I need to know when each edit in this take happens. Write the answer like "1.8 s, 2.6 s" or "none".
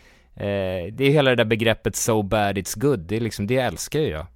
none

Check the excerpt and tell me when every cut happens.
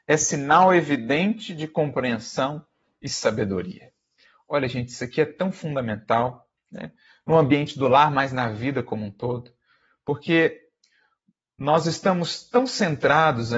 none

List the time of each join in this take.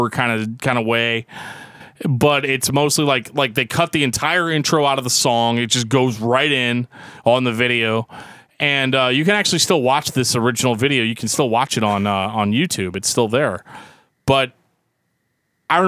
none

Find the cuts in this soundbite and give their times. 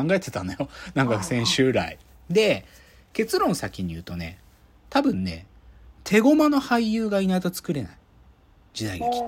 none

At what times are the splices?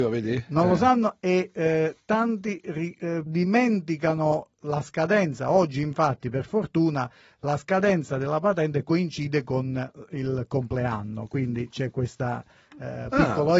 3.3 s

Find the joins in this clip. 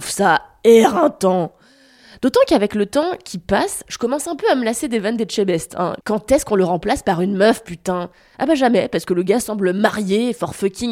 none

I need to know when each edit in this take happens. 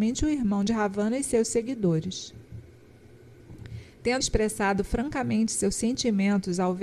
4.2 s

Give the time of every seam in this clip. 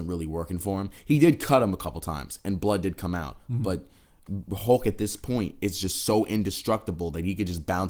none

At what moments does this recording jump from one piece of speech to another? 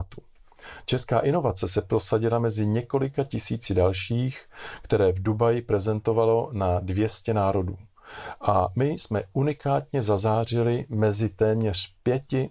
none

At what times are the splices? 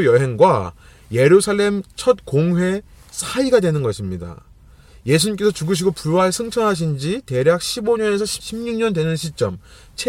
none

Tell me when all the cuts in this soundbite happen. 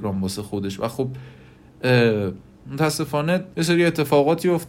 3.5 s

